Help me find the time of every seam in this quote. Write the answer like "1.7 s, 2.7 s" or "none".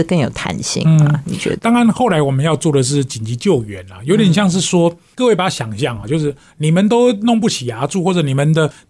none